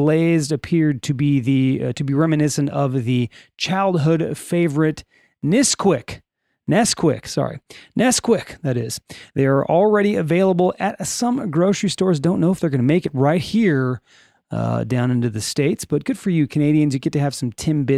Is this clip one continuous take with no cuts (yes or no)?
yes